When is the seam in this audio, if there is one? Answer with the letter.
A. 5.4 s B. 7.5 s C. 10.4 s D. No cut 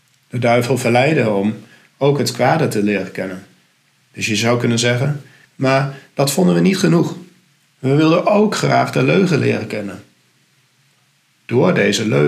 A